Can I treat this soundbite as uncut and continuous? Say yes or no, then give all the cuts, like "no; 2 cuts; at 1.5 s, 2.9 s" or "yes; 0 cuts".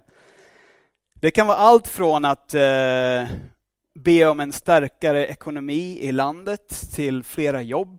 yes; 0 cuts